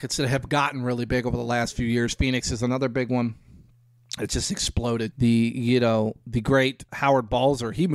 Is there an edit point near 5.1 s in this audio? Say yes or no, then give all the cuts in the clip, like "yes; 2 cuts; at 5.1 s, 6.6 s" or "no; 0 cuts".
yes; 2 cuts; at 5.1 s, 6.9 s